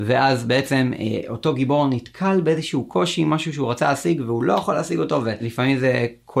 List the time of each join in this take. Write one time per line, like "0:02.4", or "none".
none

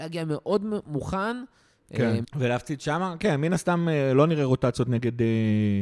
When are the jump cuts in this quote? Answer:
0:02.2

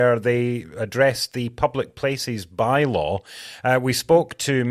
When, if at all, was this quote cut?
none

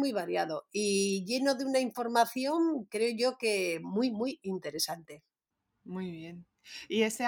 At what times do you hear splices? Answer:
none

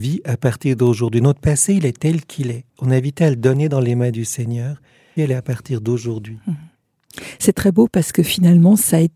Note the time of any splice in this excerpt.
0:02.7
0:05.2

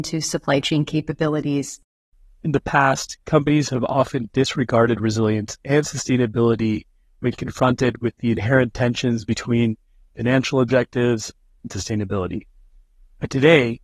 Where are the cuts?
0:11.6

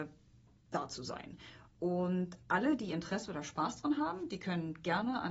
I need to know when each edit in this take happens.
none

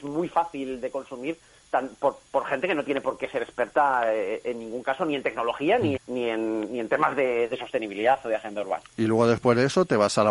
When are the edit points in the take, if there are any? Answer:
0:06.0

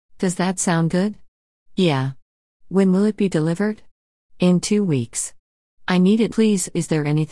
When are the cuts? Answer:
0:06.3

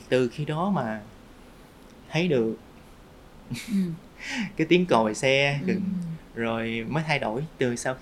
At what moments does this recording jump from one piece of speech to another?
0:05.8

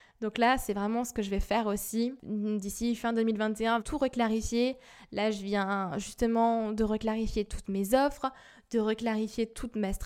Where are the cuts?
0:03.8

